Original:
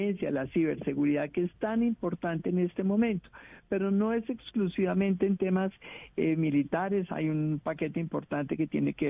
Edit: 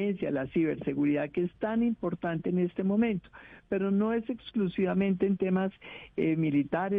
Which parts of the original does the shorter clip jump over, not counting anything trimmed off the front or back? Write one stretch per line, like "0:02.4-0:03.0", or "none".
none